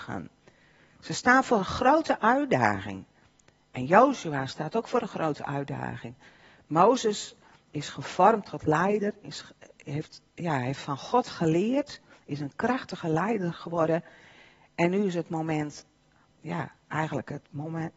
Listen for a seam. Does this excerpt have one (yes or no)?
no